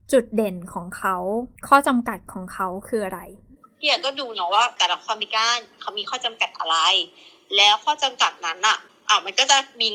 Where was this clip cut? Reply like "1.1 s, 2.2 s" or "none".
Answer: 1.6 s